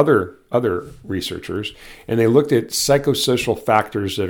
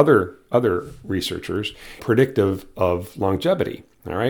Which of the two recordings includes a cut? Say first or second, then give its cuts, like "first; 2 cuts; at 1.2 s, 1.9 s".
second; 1 cut; at 2.0 s